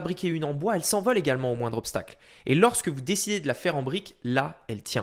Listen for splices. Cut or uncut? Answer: uncut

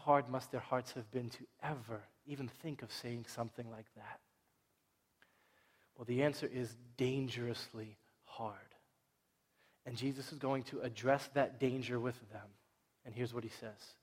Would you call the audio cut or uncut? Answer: uncut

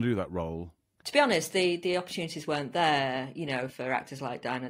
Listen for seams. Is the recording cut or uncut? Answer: cut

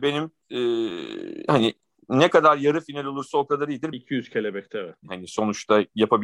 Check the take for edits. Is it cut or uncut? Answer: cut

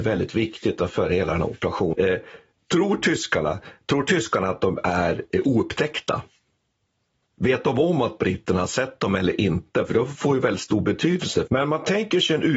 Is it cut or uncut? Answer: cut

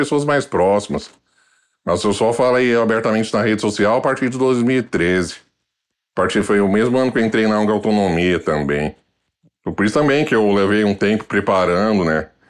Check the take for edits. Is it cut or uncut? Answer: uncut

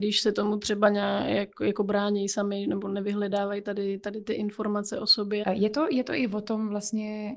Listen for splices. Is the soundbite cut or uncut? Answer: cut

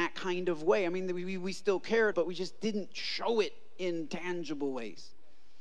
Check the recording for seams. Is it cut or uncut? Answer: cut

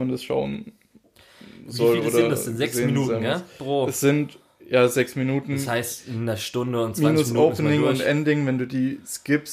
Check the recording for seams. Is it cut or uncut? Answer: uncut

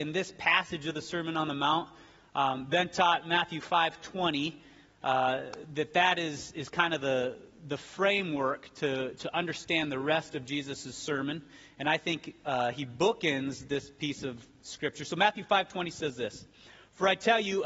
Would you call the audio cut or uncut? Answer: uncut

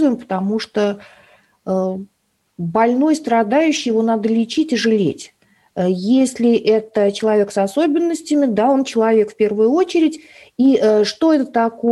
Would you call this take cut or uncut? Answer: uncut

